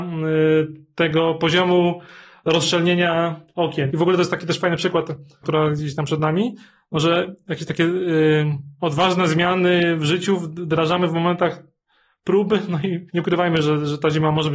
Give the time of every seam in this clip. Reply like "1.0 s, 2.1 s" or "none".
3.9 s, 5.4 s, 13.1 s